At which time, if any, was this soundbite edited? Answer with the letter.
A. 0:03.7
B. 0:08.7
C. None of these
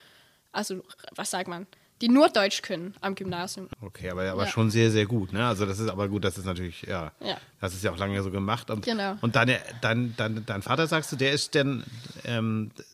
A